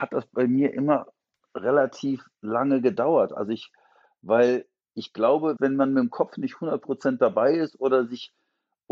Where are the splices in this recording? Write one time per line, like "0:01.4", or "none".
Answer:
0:05.6